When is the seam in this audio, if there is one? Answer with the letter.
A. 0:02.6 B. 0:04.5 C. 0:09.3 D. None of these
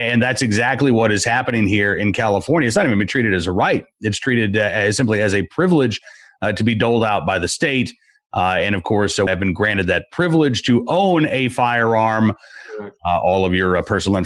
C